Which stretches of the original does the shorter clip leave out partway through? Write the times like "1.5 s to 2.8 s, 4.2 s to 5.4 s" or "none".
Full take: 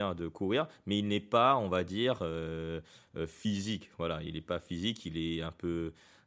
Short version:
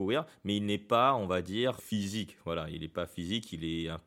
2.2 s to 3.3 s